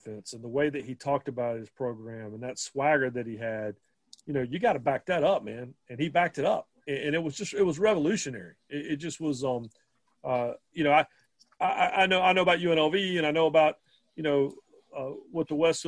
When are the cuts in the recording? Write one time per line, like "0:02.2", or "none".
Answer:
none